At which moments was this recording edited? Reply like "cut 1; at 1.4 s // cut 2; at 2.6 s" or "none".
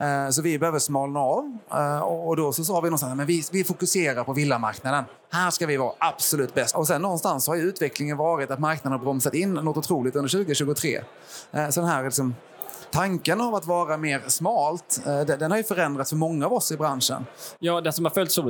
cut 1; at 6.7 s // cut 2; at 12.9 s // cut 3; at 17.6 s

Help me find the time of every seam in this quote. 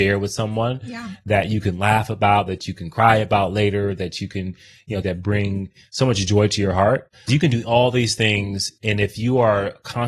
cut 1; at 5.0 s // cut 2; at 7.3 s

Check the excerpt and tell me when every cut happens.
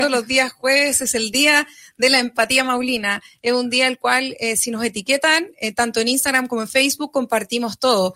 none

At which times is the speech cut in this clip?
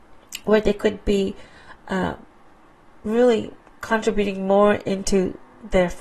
none

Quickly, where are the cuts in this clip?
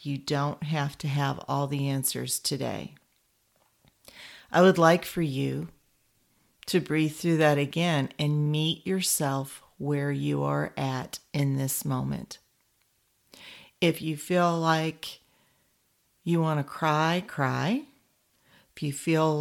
none

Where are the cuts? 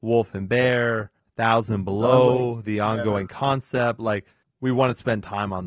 cut 1; at 1.2 s

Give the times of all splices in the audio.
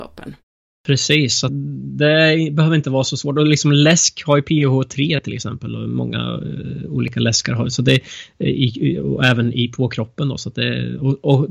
cut 1; at 1.5 s

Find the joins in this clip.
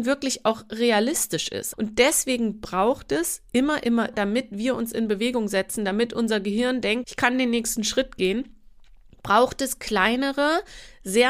cut 1; at 1.7 s // cut 2; at 4.1 s // cut 3; at 7.0 s

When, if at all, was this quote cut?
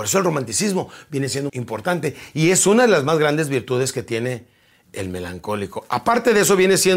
cut 1; at 1.5 s

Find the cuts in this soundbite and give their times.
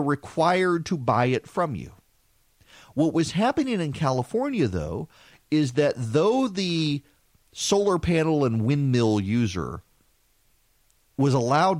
none

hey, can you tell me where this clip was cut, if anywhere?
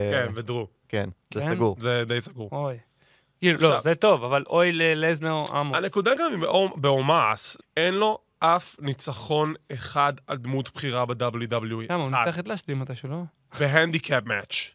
cut 1; at 7.6 s

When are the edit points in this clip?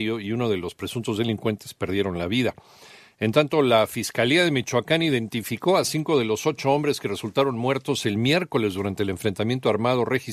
none

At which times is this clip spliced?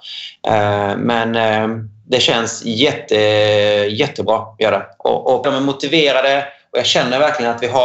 cut 1; at 5.4 s

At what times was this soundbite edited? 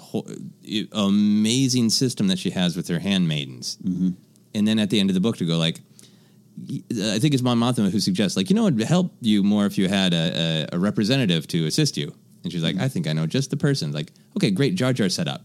none

